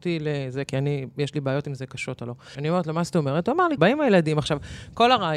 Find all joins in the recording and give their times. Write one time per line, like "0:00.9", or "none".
0:02.5
0:03.8